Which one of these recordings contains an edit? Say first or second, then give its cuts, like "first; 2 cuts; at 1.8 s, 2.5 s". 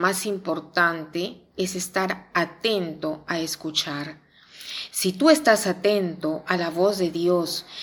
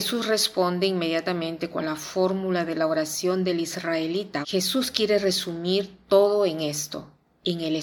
second; 1 cut; at 4.4 s